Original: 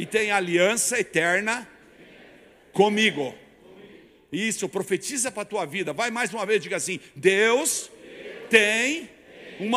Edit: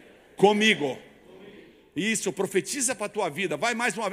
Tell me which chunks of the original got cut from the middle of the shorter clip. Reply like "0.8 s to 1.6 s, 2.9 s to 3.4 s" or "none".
none